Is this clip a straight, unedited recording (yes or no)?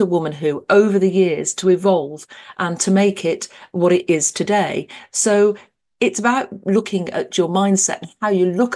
yes